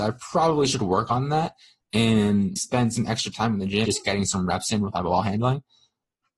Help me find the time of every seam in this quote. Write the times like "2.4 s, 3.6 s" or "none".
2.6 s, 3.8 s